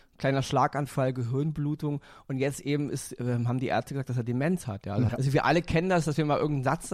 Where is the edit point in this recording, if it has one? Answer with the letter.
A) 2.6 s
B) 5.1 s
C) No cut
B